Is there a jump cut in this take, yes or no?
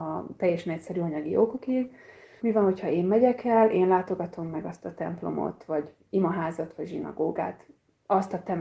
yes